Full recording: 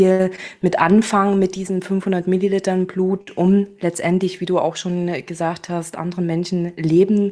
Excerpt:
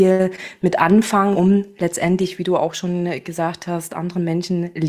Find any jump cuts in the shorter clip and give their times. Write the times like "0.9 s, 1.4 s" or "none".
1.3 s